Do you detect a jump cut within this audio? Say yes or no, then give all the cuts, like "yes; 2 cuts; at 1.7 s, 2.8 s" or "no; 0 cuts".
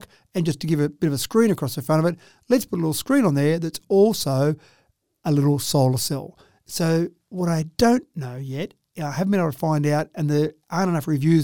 no; 0 cuts